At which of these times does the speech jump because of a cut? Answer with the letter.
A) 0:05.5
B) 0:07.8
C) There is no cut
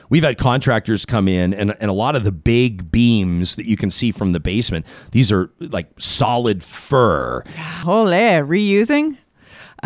B